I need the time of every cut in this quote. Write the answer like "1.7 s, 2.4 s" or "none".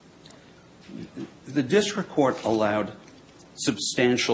none